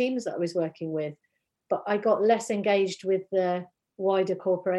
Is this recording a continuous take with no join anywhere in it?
yes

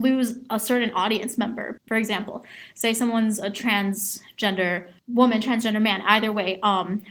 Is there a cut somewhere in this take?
yes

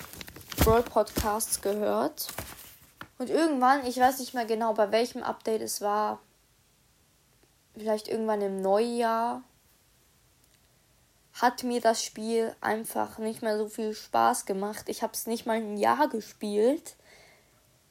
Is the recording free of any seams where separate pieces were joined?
no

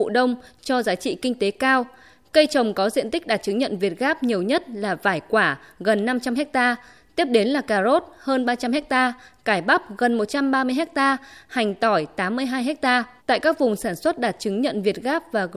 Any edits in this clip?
yes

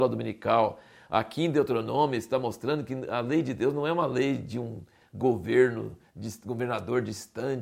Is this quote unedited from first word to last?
yes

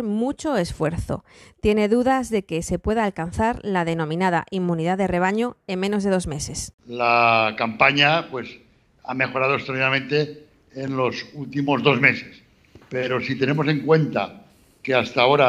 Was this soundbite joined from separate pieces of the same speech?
no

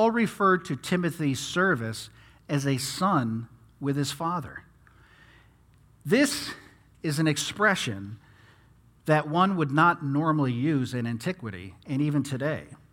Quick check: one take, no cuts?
yes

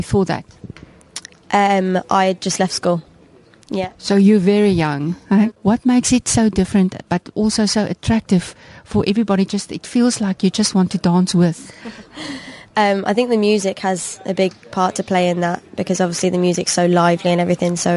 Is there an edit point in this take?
yes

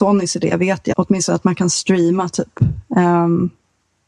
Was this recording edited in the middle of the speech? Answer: yes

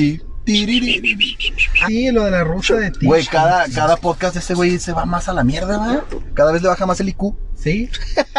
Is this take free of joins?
no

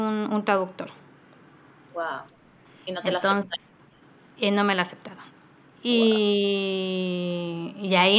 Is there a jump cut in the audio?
no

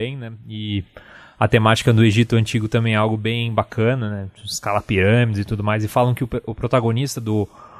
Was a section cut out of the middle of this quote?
no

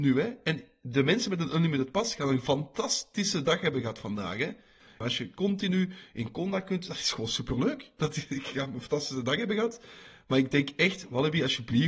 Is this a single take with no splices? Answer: yes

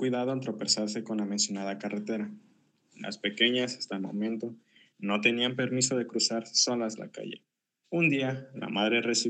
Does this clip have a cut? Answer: no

